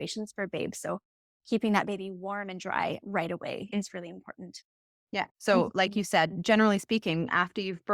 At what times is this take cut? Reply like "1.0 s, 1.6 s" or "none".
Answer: 5.3 s